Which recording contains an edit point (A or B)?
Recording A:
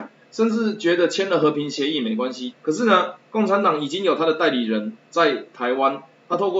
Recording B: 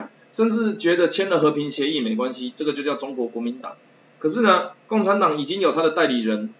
A